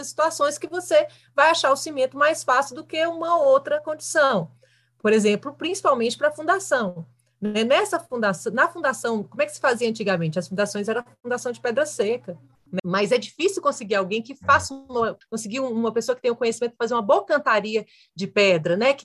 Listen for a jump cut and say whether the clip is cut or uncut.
cut